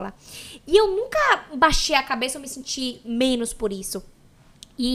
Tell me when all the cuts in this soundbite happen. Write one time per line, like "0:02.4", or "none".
none